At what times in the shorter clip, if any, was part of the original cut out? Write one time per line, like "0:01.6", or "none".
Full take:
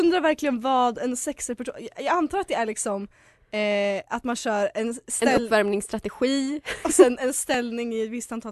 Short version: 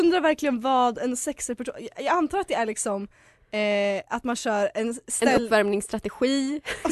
none